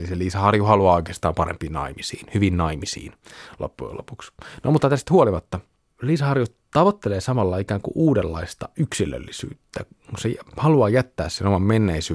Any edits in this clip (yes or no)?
no